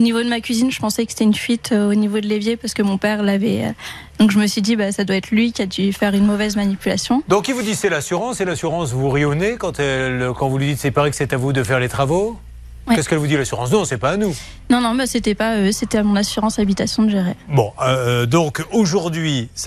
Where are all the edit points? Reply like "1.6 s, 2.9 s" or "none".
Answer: 4.1 s